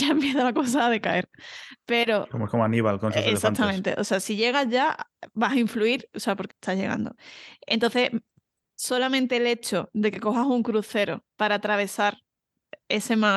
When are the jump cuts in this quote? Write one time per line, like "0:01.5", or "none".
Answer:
0:06.5
0:11.3